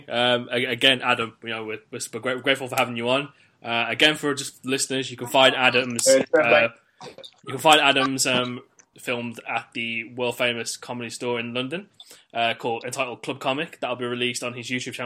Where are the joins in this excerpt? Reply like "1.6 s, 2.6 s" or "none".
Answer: 8.9 s

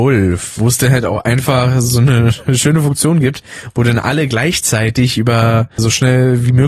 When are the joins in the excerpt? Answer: 5.8 s

